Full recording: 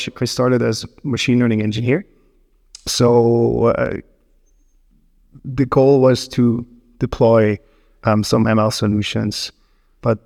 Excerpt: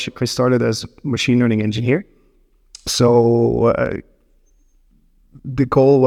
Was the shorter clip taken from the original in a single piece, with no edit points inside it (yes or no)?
yes